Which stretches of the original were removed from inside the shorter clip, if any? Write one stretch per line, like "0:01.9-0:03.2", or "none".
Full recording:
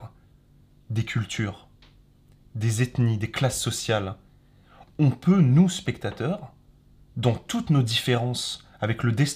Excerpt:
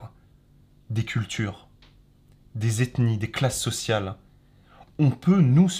none